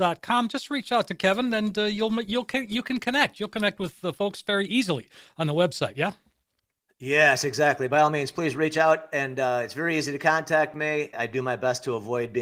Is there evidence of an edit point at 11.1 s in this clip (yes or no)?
yes